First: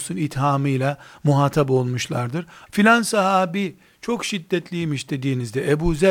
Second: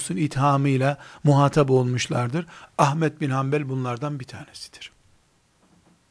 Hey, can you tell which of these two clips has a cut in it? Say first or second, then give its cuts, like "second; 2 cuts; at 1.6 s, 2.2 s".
first; 1 cut; at 2.7 s